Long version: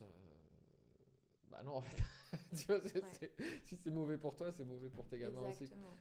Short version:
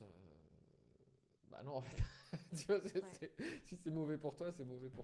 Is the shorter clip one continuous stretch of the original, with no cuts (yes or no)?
yes